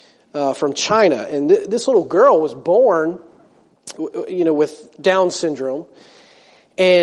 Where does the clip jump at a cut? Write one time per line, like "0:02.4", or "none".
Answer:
0:03.9